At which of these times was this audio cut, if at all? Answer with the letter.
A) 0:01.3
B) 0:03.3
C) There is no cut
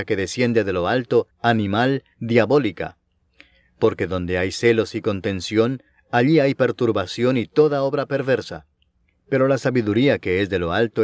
A